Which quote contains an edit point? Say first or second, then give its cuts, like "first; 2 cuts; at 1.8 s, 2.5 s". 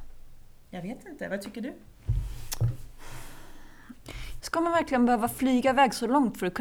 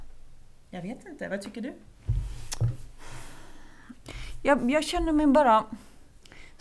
first; 1 cut; at 4.4 s